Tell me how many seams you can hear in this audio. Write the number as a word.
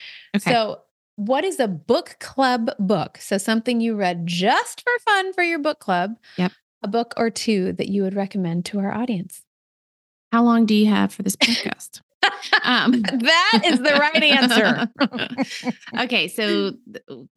zero